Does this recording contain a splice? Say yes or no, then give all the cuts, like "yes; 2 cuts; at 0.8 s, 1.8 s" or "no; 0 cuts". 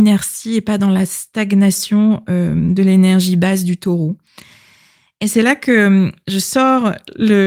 no; 0 cuts